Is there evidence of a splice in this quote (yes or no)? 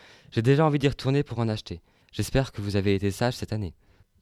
yes